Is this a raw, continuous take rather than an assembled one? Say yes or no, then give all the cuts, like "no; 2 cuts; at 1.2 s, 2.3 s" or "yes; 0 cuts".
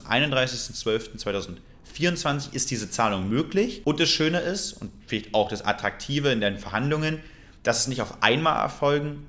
yes; 0 cuts